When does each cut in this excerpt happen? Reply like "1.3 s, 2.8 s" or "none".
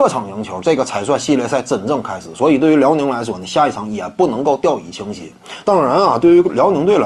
5.6 s